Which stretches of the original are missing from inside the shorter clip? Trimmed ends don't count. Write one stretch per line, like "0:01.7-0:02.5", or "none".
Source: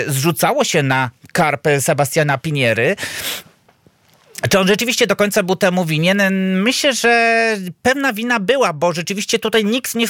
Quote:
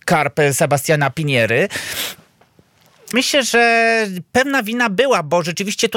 0:04.4-0:06.6